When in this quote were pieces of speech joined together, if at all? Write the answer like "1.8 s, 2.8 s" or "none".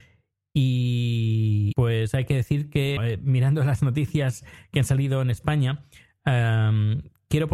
1.7 s, 3.0 s